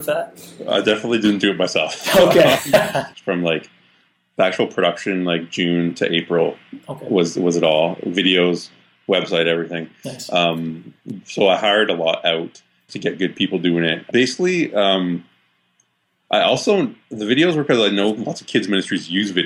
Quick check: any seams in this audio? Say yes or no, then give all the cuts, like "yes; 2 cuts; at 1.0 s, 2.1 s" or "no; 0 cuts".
yes; 3 cuts; at 3.1 s, 12.9 s, 14.1 s